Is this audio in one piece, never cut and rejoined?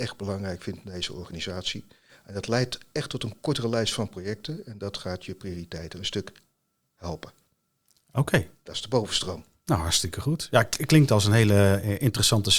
yes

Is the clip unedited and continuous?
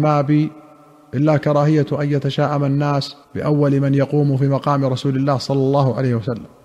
no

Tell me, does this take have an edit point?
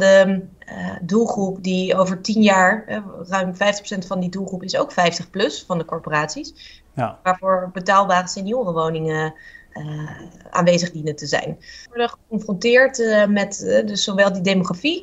yes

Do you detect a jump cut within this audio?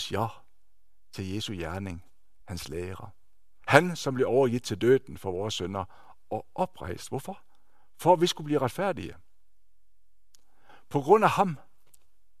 yes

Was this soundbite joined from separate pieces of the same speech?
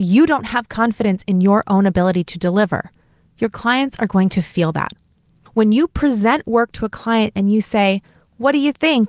no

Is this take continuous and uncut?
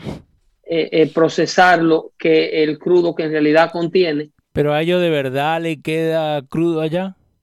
yes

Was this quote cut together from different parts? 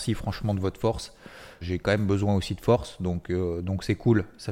yes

